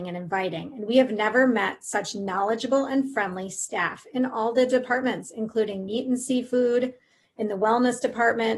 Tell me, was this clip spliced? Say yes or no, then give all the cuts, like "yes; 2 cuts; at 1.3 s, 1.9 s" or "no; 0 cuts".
no; 0 cuts